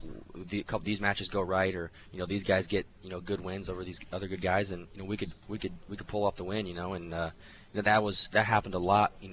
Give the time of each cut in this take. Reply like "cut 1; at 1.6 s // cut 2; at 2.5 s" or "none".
none